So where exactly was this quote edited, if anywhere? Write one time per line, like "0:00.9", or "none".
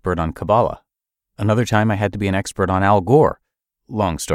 none